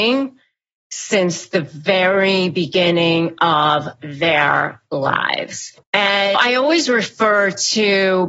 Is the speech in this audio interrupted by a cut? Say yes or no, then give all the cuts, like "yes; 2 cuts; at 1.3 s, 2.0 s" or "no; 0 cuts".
yes; 1 cut; at 5.8 s